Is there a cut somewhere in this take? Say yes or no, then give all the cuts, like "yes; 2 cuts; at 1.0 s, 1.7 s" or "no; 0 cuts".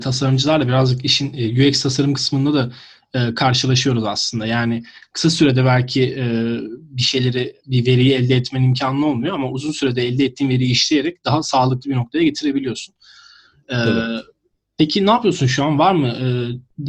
no; 0 cuts